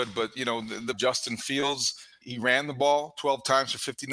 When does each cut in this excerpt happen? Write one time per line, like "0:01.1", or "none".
0:00.9
0:02.2